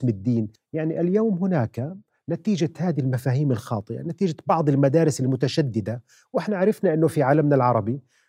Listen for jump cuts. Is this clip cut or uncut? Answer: uncut